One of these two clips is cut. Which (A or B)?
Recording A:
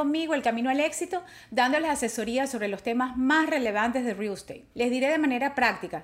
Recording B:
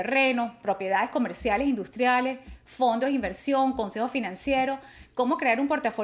A